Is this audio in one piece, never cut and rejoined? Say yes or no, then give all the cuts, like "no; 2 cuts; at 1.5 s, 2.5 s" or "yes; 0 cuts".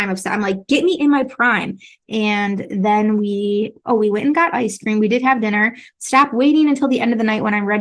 no; 2 cuts; at 2.0 s, 6.0 s